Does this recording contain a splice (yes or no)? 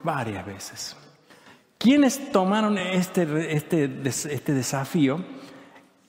no